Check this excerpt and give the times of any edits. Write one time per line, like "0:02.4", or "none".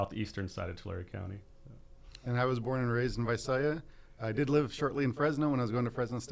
none